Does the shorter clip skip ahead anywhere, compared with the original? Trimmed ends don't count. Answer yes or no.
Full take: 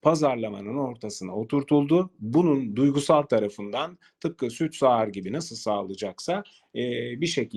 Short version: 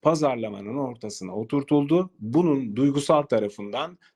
no